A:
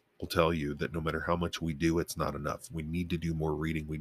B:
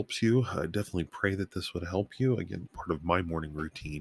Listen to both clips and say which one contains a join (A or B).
B